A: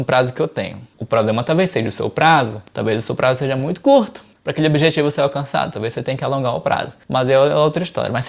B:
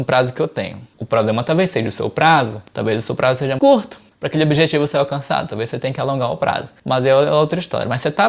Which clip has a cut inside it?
B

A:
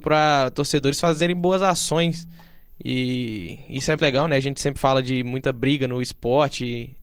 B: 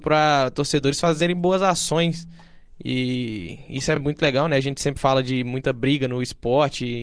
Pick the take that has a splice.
A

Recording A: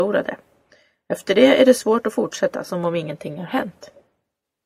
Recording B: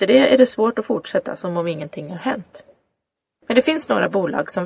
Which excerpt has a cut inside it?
B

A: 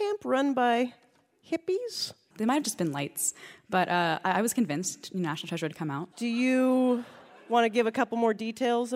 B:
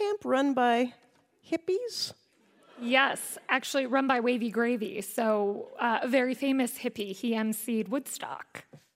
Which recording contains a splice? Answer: A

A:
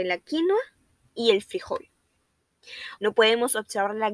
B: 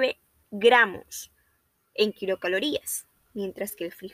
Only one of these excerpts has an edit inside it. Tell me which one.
A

